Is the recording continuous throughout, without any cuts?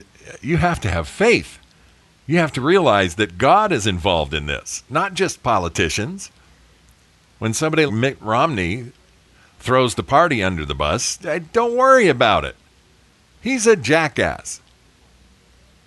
no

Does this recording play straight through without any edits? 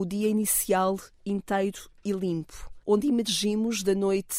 no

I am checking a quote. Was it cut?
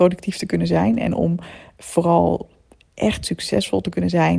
no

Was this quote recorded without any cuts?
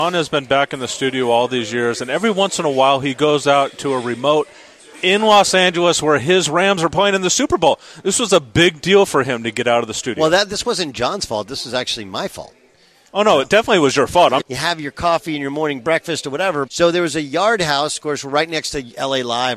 no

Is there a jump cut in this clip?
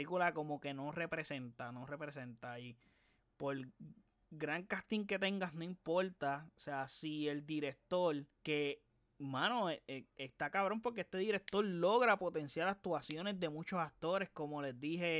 yes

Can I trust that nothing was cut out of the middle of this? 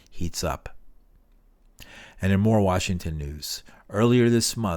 yes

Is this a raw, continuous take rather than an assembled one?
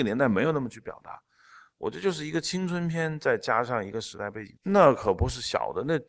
no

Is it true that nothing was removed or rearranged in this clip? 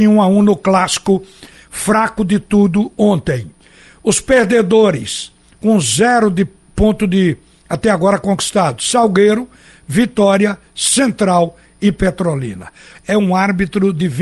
no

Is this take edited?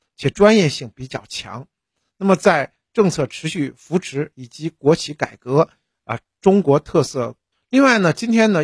yes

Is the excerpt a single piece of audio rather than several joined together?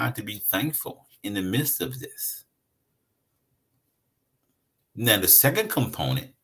yes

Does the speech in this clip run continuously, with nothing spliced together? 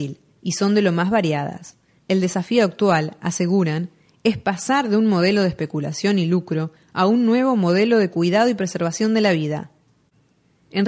no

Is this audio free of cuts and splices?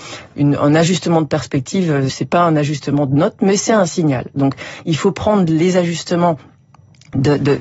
no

